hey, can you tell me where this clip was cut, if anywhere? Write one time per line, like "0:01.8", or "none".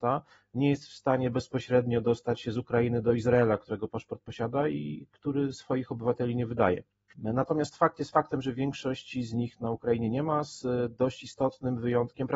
0:07.1